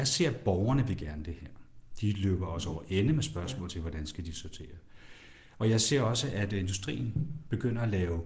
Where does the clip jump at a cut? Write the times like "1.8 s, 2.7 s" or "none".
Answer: 2.0 s